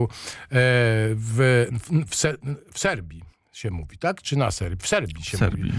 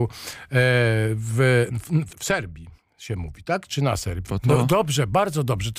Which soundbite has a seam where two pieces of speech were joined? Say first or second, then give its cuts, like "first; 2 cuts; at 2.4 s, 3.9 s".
second; 2 cuts; at 2.1 s, 4.3 s